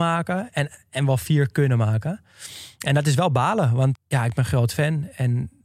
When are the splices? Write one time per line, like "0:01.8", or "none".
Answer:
0:03.9